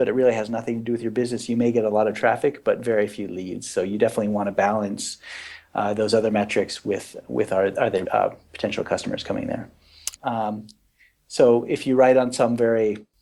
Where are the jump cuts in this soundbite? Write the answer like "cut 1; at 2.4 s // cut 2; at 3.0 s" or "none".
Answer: cut 1; at 8.0 s // cut 2; at 10.2 s